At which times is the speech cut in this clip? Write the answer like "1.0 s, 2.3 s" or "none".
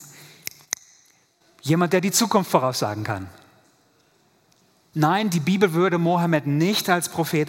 4.9 s